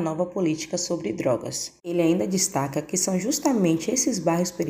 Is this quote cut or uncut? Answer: uncut